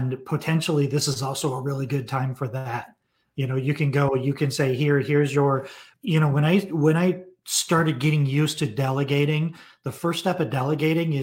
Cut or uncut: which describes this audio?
cut